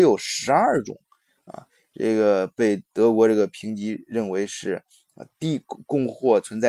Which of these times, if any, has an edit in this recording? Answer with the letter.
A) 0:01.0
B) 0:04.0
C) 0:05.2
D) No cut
D